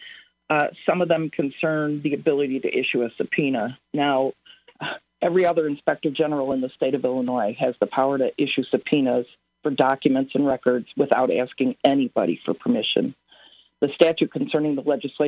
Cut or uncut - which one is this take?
uncut